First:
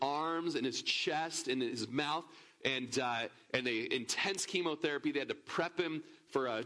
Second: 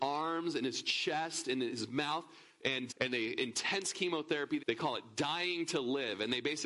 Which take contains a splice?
second; 2 cuts; at 2.9 s, 4.6 s

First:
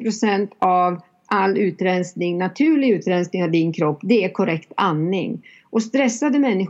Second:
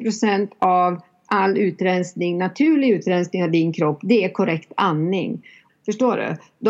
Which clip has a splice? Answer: second; 1 cut; at 5.7 s

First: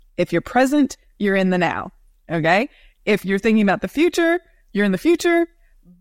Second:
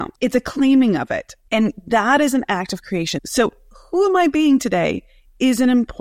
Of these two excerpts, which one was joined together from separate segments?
second; 2 cuts; at 1.5 s, 3.2 s

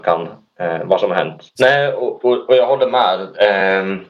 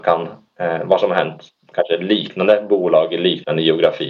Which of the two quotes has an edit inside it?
first; 1 cut; at 1.5 s

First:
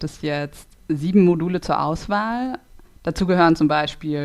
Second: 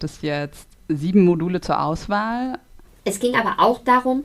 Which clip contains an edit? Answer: second; 1 cut; at 2.9 s

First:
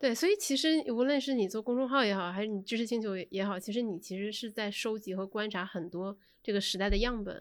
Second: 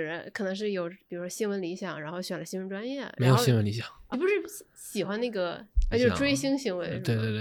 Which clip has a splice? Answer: second; 2 cuts; at 4.1 s, 5.9 s

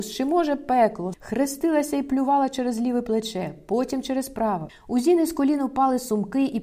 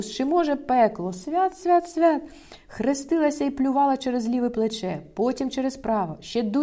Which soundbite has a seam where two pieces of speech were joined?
first; 2 cuts; at 1.1 s, 4.7 s

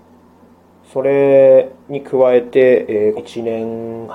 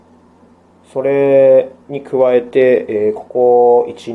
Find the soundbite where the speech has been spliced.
first; 1 cut; at 3.2 s

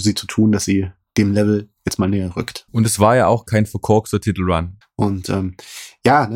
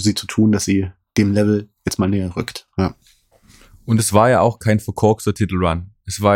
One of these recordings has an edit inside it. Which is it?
first; 2 cuts; at 2.7 s, 4.8 s

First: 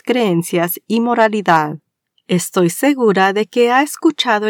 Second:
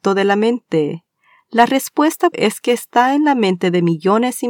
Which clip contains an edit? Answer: second; 1 cut; at 2.3 s

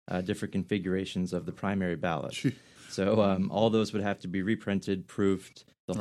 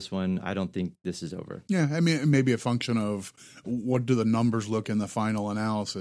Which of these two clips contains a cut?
second; 1 cut; at 4.8 s

